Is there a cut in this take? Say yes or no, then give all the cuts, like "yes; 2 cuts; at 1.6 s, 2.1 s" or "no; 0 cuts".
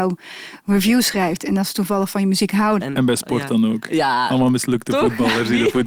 yes; 1 cut; at 2.8 s